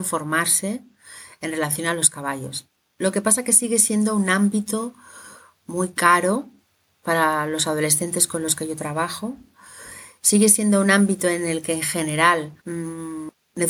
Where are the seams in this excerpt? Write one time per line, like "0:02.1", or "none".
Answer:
0:12.6